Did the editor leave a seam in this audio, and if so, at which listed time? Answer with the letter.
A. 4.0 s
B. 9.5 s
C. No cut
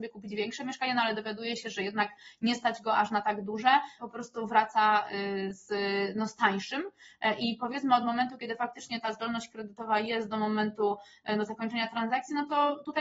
A